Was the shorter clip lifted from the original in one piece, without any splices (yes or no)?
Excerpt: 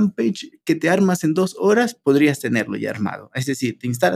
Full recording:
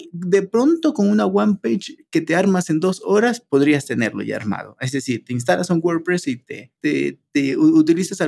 yes